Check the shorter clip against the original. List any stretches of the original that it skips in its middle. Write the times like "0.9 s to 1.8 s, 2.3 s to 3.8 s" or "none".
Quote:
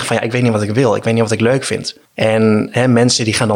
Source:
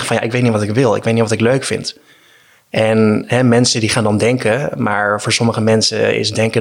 2.1 s to 2.6 s